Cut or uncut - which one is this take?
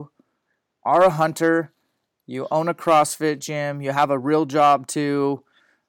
uncut